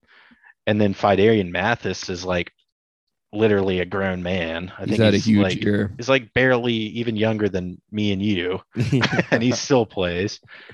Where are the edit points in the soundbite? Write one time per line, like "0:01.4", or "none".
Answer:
none